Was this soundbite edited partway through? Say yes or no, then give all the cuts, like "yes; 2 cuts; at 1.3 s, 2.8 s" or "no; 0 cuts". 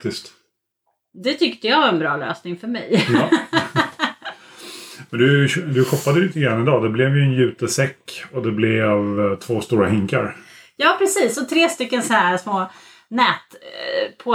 no; 0 cuts